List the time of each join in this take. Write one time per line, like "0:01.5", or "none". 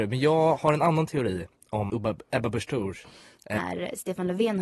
0:01.9
0:03.6